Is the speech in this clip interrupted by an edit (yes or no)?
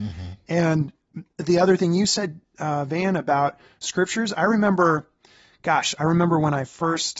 no